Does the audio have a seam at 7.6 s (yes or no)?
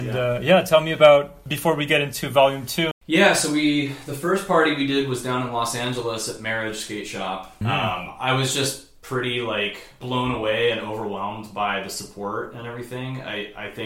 yes